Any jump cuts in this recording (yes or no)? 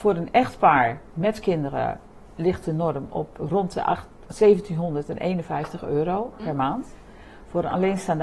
yes